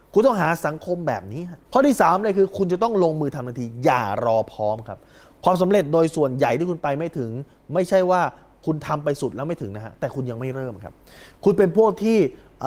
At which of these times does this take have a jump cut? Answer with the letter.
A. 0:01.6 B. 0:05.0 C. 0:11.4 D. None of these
A